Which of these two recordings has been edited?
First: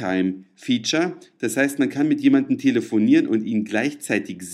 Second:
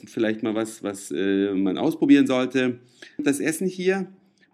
second; 1 cut; at 3.2 s

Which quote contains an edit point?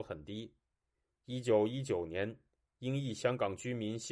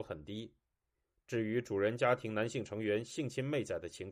first; 1 cut; at 1.1 s

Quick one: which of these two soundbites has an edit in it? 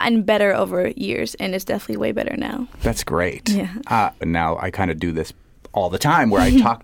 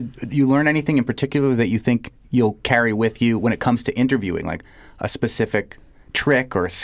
first; 1 cut; at 4.2 s

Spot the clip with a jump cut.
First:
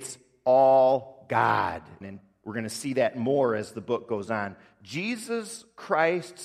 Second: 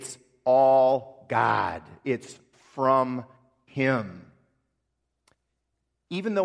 first; 1 cut; at 2.0 s

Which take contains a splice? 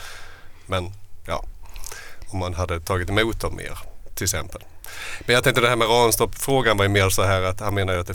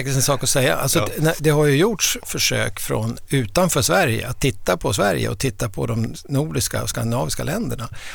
second; 1 cut; at 1.4 s

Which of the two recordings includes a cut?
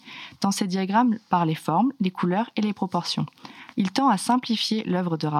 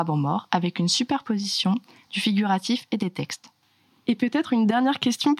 first; 1 cut; at 3.7 s

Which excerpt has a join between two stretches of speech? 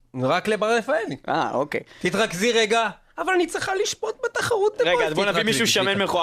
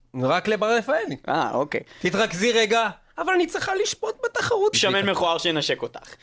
second; 1 cut; at 4.7 s

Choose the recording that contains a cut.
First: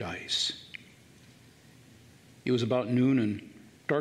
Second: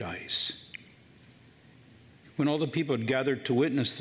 second; 1 cut; at 2.2 s

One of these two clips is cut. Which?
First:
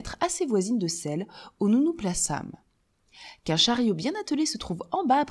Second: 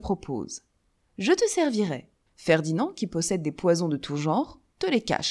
second; 2 cuts; at 1.1 s, 2.3 s

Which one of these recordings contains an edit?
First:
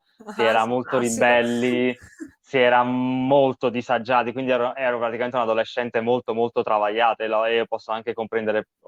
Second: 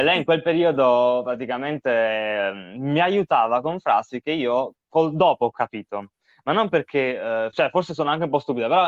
second; 1 cut; at 7.5 s

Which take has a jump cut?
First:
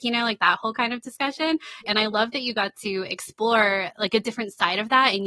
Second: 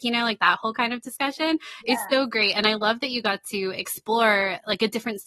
first; 1 cut; at 1.9 s

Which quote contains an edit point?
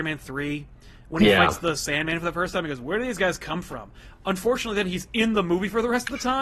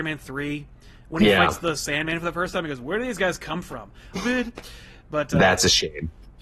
second; 1 cut; at 4.1 s

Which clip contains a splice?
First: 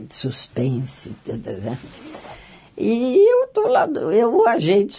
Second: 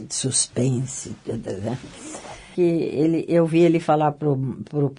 second; 1 cut; at 2.5 s

